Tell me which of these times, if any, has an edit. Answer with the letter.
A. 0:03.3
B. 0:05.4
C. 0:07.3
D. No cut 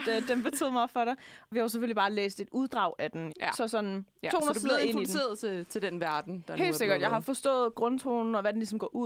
A